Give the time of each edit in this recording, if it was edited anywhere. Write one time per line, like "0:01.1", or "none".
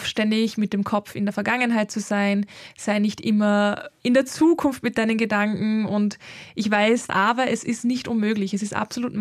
0:07.1